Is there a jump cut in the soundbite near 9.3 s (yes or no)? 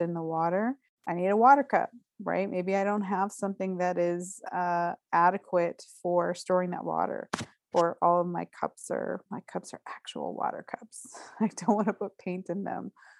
yes